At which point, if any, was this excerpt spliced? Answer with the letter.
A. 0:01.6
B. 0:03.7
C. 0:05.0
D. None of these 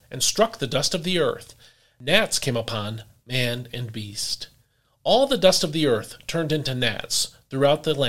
D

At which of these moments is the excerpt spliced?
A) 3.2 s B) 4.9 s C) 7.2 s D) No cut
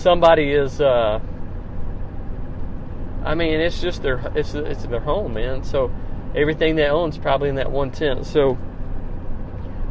B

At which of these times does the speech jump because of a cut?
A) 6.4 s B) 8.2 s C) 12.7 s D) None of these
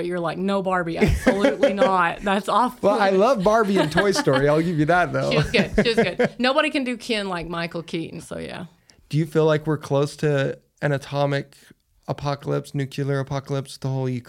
B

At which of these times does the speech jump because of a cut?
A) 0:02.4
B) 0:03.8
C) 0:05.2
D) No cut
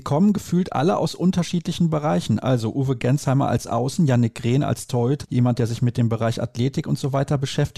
C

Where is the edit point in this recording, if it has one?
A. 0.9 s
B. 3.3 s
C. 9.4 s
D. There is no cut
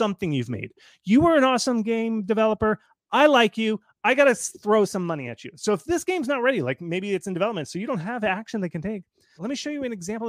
C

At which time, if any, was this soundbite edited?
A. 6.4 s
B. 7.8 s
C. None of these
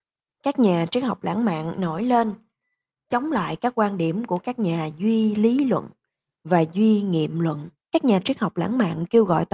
B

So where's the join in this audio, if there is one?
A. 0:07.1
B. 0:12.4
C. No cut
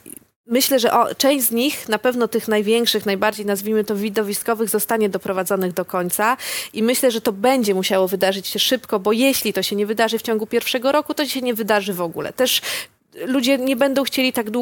C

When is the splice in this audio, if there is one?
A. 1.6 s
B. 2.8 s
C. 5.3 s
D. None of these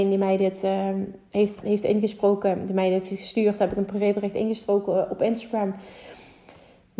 A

